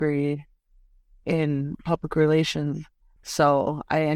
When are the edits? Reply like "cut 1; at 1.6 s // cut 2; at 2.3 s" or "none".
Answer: cut 1; at 3.2 s